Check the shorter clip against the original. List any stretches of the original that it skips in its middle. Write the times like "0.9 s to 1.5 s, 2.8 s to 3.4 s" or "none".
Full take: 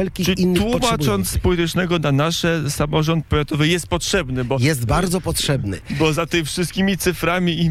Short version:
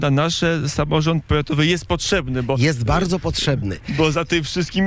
none